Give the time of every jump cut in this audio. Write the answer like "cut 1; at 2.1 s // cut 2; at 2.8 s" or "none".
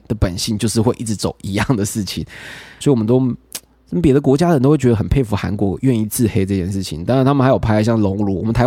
cut 1; at 2.8 s

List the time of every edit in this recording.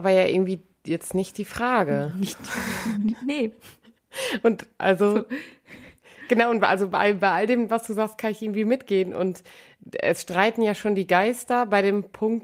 none

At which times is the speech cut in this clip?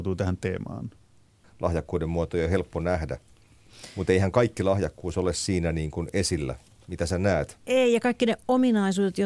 cut 1; at 1.4 s

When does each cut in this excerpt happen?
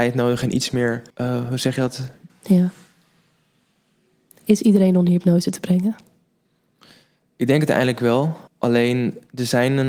cut 1; at 1.1 s // cut 2; at 2.3 s // cut 3; at 8.5 s

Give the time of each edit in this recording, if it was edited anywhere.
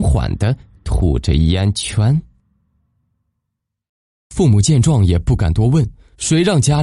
none

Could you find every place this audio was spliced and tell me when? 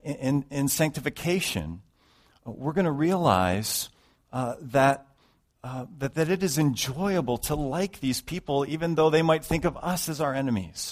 cut 1; at 6.1 s

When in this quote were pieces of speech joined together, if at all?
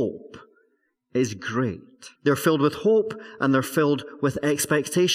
cut 1; at 2.1 s

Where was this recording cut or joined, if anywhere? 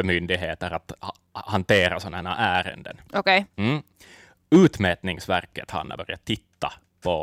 none

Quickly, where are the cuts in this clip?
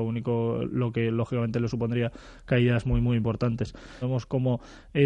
cut 1; at 4.0 s

